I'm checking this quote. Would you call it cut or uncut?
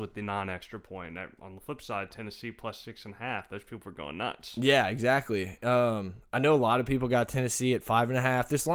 uncut